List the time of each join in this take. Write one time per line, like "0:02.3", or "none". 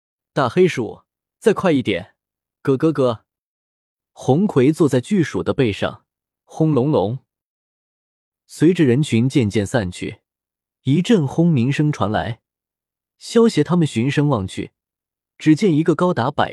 0:06.3